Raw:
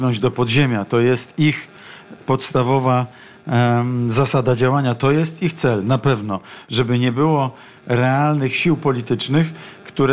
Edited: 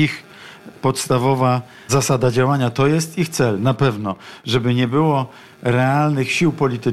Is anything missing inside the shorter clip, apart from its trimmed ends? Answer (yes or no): yes